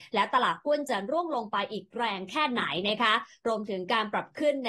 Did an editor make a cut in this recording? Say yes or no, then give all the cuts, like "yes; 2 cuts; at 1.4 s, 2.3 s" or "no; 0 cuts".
no; 0 cuts